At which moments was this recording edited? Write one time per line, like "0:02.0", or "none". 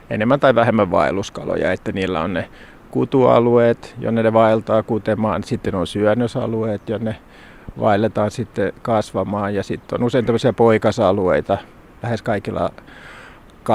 none